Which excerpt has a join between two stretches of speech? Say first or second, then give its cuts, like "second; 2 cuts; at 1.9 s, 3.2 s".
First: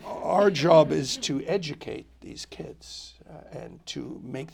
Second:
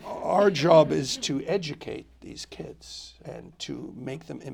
second; 1 cut; at 3.2 s